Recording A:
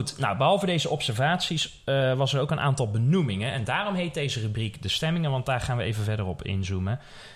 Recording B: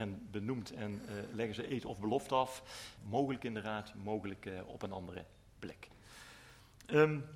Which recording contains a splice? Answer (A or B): B